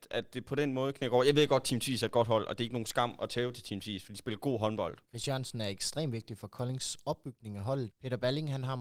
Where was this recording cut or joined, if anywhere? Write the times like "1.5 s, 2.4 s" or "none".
5.0 s, 7.9 s